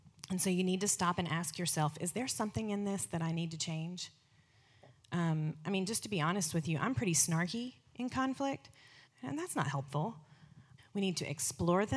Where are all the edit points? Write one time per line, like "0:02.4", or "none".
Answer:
0:09.1
0:10.8